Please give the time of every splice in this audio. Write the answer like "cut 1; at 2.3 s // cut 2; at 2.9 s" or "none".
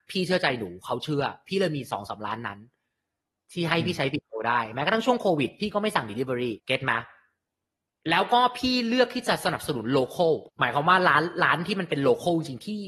cut 1; at 6.6 s // cut 2; at 10.5 s